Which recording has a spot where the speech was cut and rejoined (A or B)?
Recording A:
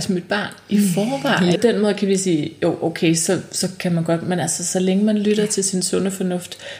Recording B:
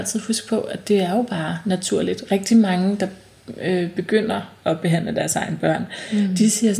A